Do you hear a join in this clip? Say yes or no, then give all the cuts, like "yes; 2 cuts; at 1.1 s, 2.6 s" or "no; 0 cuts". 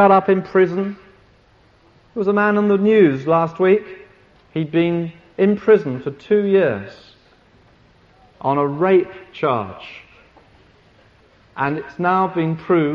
no; 0 cuts